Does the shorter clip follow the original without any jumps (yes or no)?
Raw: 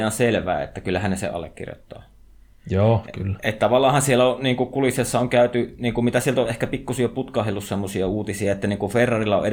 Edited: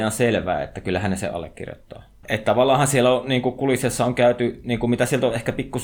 no